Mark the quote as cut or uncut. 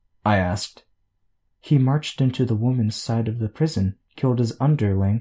uncut